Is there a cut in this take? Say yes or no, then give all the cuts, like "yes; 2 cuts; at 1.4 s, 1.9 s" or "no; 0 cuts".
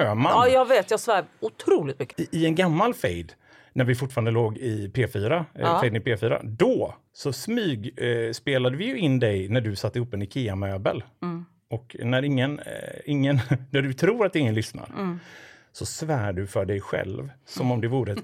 no; 0 cuts